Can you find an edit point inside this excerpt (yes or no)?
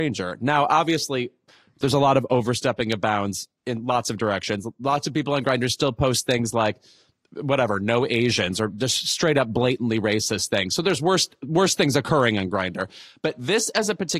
yes